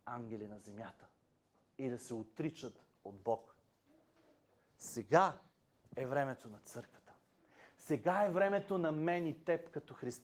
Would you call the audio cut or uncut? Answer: uncut